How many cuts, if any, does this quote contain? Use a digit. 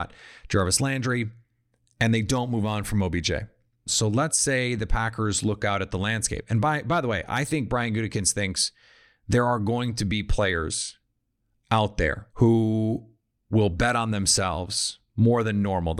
2